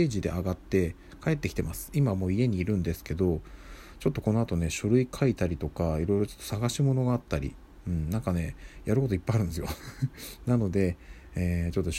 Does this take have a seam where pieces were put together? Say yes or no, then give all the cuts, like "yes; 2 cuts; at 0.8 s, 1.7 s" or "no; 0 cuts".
no; 0 cuts